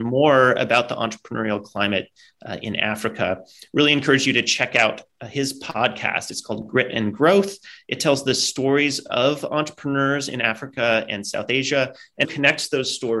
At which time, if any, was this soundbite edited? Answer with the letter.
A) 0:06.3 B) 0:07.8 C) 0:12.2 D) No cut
C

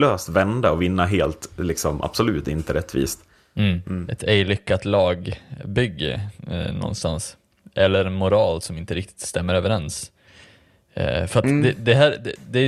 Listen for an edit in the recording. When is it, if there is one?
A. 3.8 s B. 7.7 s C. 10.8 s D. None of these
A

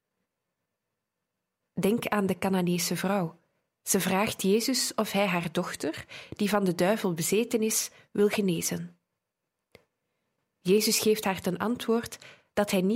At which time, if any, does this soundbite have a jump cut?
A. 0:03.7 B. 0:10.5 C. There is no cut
A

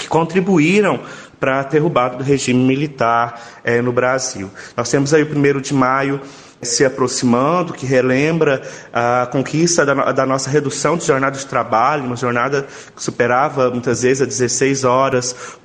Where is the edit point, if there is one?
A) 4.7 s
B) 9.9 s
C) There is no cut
A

